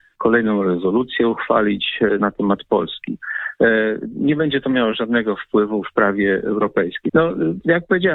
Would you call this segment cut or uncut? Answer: cut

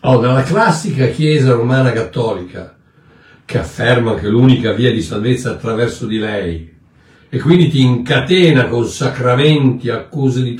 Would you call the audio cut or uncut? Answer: uncut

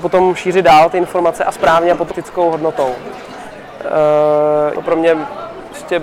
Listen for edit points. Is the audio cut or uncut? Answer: cut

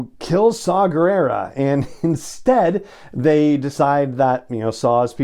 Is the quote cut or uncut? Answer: uncut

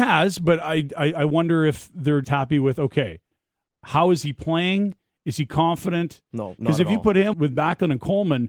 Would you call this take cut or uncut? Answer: cut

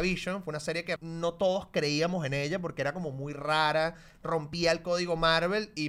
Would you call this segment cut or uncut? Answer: cut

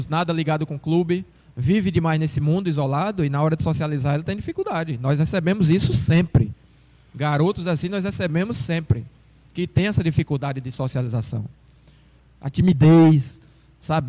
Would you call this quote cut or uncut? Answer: cut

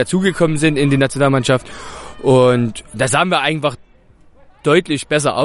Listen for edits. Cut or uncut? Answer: uncut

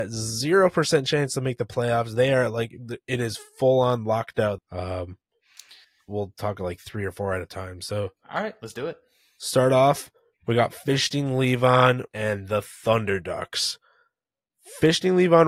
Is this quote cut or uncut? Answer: cut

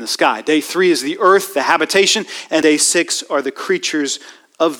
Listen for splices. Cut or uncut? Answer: cut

